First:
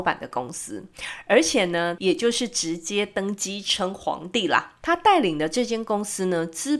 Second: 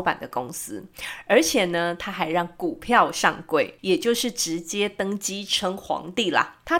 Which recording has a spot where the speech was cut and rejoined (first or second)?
first